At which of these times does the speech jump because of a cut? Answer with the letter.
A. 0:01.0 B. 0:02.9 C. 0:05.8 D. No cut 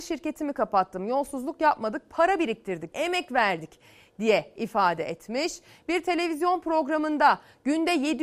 B